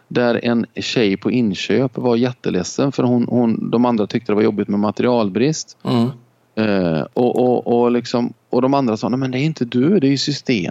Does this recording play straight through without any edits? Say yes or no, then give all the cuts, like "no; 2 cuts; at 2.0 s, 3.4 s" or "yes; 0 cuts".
yes; 0 cuts